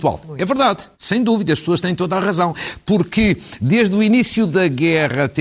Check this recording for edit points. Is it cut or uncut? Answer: cut